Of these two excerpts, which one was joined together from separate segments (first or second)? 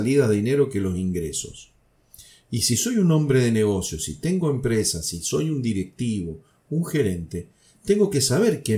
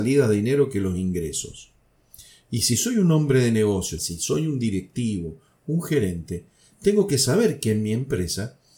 second